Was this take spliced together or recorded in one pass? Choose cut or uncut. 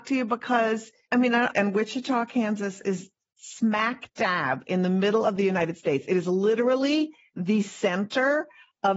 cut